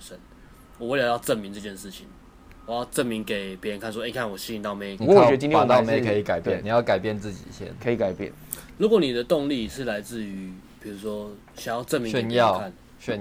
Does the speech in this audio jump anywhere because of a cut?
yes; 2 cuts; at 5.0 s, 8.8 s

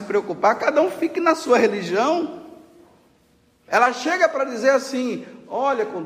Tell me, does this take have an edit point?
yes; 1 cut; at 3.7 s

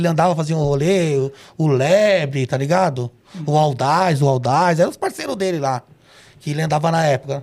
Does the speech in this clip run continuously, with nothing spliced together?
yes; 0 cuts

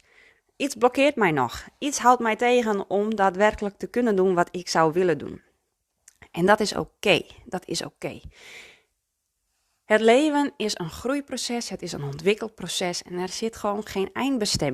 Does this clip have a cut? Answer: no; 0 cuts

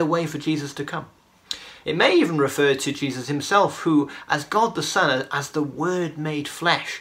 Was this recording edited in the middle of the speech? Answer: no; 0 cuts

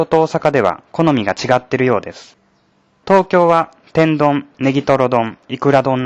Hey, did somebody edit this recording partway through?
no; 0 cuts

